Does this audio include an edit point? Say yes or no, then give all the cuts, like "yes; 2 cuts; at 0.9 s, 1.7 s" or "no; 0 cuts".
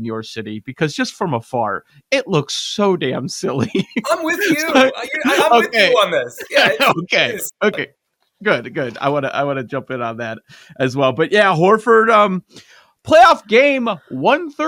no; 0 cuts